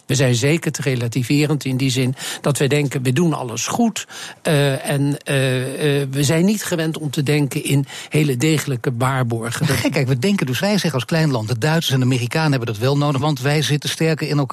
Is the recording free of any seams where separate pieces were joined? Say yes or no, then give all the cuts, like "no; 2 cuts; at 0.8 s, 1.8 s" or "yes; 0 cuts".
no; 2 cuts; at 10.6 s, 13.2 s